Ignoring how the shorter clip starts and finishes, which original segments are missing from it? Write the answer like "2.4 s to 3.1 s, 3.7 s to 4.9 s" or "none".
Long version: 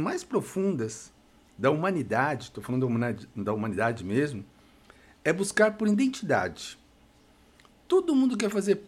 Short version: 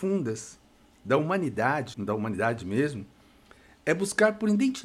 2.5 s to 3.3 s